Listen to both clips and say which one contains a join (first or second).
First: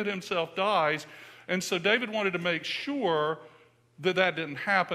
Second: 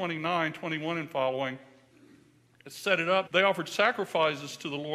second